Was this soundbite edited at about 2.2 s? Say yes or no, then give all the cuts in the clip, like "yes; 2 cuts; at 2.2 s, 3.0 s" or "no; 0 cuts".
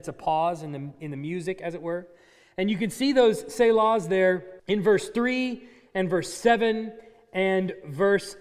no; 1 cut; at 4.6 s